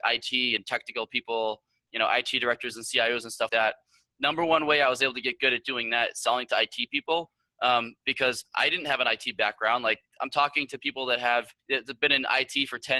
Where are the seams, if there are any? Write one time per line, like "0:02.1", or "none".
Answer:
0:03.5
0:11.6

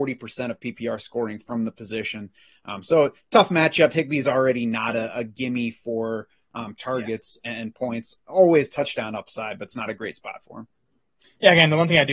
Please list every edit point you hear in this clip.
none

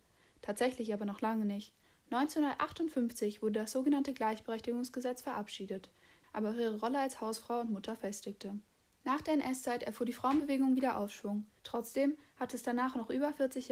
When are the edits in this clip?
0:06.2
0:08.9
0:11.6

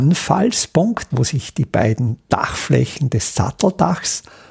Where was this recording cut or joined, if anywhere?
0:01.1

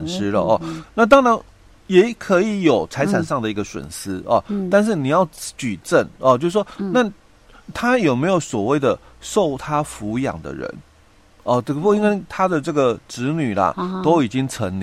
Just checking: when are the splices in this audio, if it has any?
none

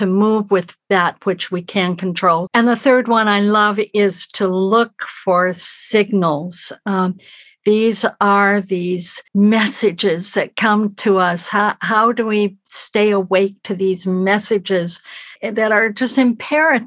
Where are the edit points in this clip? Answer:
0:02.5
0:09.3

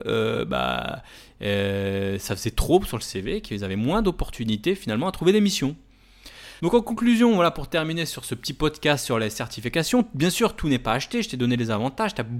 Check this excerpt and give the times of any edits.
0:06.6

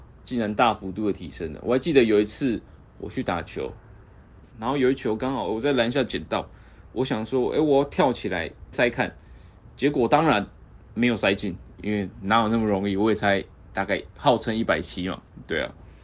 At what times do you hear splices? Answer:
0:04.4
0:08.7

